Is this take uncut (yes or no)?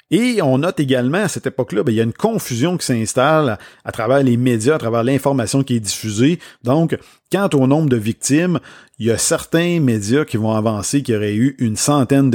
yes